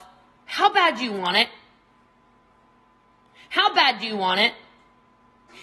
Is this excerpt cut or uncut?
uncut